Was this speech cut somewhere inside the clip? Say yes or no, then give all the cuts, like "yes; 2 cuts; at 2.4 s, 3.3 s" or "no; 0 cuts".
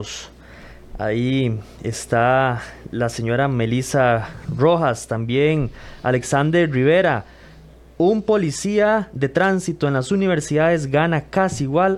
no; 0 cuts